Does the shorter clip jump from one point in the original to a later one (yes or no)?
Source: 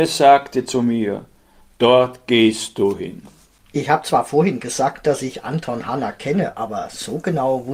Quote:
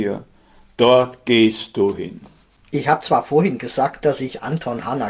no